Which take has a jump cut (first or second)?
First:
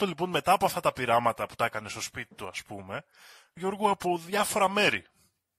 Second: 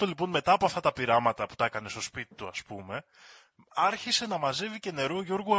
first